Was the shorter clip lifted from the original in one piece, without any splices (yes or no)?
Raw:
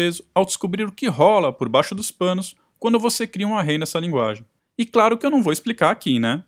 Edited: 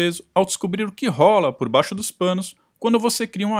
yes